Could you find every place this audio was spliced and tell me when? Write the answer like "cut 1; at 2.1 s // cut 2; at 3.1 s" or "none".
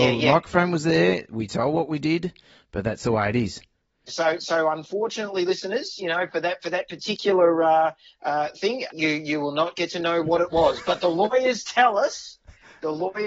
cut 1; at 4.1 s // cut 2; at 8.9 s